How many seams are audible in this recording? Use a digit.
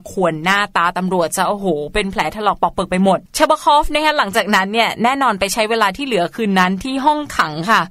1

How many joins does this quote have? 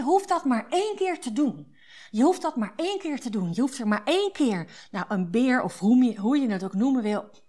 0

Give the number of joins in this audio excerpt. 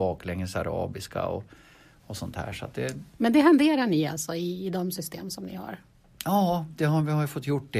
0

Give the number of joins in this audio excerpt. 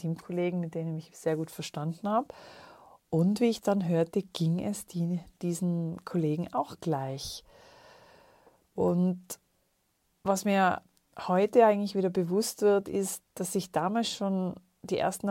0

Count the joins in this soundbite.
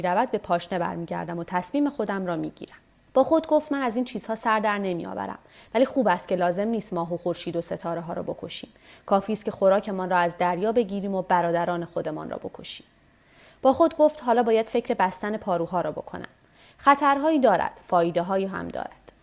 1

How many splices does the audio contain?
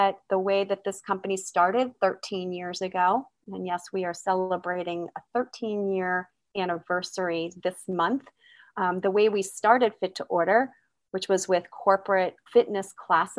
1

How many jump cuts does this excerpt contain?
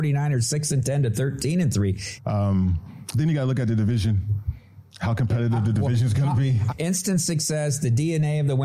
2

